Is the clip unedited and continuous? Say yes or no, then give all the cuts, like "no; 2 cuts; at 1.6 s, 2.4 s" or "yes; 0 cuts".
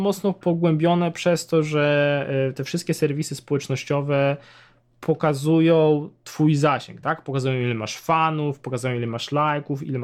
yes; 0 cuts